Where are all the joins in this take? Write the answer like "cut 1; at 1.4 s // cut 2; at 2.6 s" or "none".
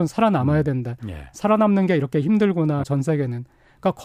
cut 1; at 2.8 s